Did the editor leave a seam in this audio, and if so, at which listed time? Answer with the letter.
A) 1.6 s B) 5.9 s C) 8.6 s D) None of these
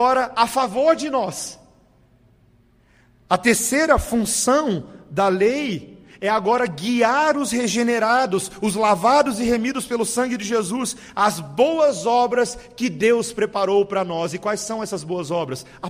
D